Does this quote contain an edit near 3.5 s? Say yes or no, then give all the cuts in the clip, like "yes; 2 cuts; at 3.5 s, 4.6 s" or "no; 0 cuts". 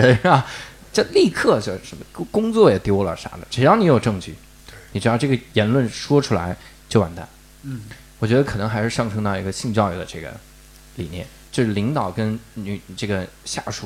no; 1 cut; at 11.5 s